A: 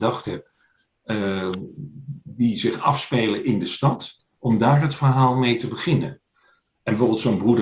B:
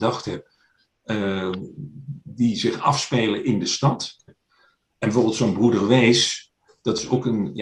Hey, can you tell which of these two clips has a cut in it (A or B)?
B